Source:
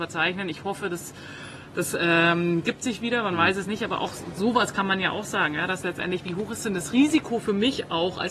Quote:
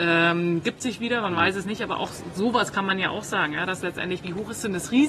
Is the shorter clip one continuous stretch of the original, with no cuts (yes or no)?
yes